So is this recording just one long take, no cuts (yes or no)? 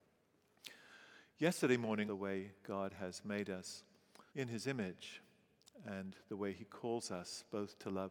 no